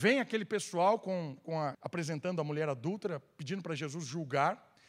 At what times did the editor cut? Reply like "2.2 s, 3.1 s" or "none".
1.7 s